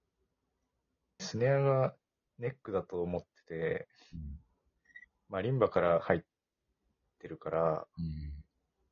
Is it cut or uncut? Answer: cut